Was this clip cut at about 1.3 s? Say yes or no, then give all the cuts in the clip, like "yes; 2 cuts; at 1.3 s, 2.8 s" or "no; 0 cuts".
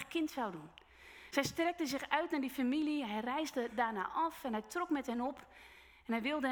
no; 0 cuts